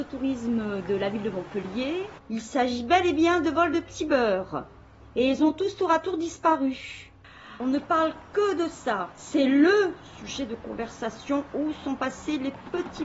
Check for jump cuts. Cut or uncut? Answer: cut